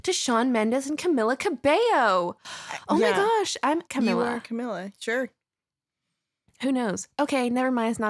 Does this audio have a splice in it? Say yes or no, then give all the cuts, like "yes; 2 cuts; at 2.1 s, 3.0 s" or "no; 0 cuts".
yes; 1 cut; at 3.9 s